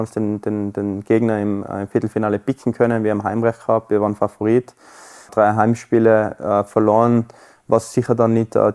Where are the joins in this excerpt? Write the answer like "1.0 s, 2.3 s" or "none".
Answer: 5.3 s

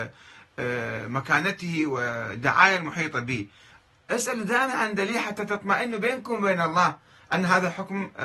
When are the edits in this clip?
none

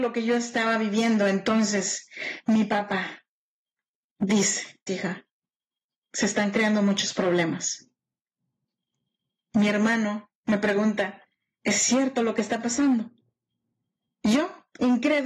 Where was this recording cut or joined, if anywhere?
4.9 s

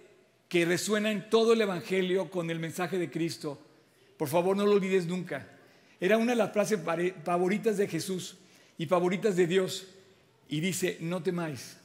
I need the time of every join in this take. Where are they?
none

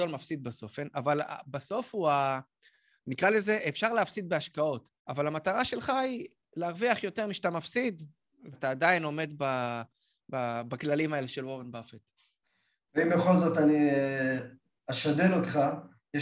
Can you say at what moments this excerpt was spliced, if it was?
5.0 s, 8.5 s

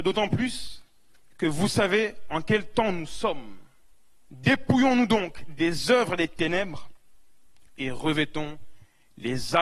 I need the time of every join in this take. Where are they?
4.3 s

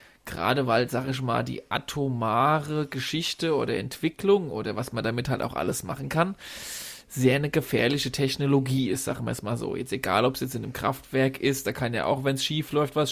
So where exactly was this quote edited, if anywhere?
none

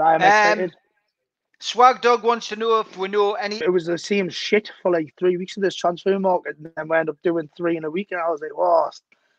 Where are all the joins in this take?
3.6 s

